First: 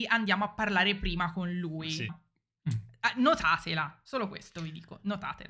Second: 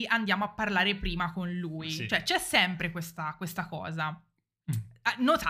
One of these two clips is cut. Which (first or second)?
first